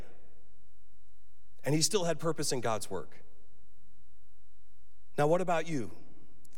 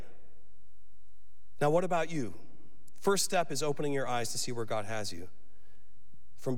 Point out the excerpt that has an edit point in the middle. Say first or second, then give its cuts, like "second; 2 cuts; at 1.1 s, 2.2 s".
second; 1 cut; at 1.6 s